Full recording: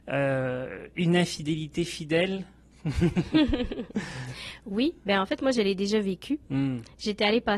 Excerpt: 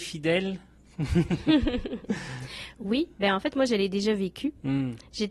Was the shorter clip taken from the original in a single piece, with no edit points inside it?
yes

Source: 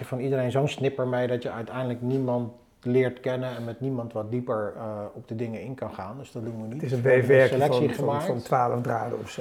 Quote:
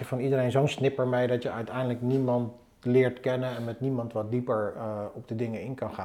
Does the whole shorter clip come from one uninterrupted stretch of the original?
yes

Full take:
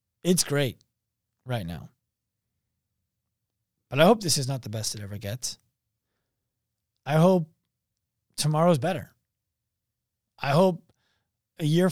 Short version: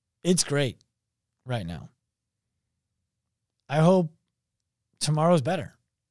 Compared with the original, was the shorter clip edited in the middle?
yes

